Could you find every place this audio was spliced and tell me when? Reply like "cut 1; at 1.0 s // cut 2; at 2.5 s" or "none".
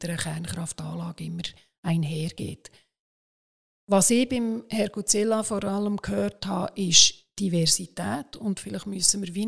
none